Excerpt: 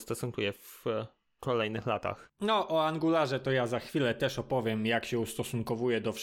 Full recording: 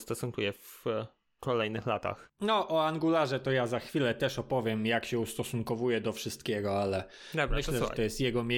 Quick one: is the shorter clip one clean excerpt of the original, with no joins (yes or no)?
yes